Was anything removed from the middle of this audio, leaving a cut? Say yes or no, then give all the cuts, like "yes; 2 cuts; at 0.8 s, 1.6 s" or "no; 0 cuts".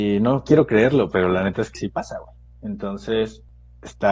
yes; 1 cut; at 1.7 s